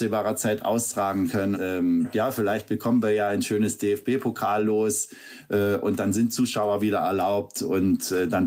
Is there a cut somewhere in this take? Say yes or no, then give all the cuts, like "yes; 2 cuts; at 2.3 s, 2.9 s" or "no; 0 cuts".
yes; 1 cut; at 1.5 s